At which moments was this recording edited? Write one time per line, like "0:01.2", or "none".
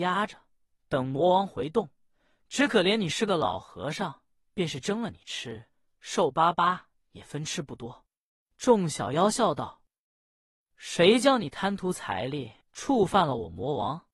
0:08.4
0:12.6